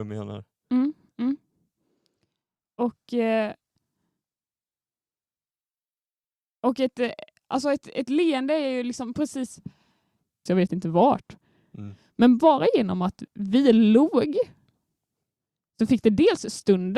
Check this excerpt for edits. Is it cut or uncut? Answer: cut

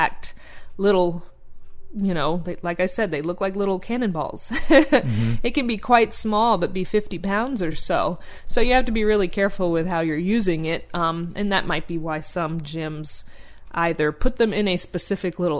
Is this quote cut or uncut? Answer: uncut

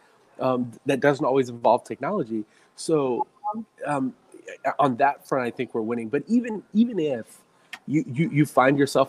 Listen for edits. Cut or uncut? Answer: uncut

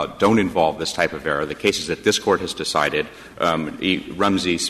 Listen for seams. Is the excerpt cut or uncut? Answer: uncut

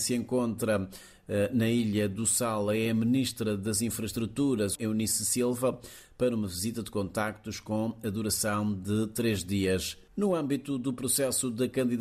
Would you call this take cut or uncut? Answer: cut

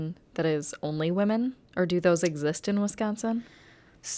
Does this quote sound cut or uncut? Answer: cut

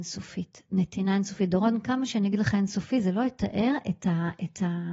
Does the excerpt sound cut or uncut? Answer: uncut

